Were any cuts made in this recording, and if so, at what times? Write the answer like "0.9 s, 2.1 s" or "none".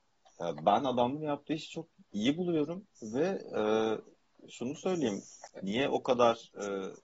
2.9 s, 5.5 s